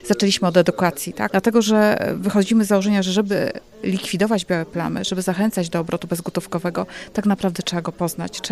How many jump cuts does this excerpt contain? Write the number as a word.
one